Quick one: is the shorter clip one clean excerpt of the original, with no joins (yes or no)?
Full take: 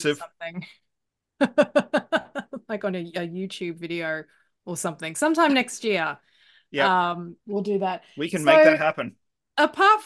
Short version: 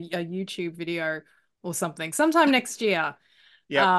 yes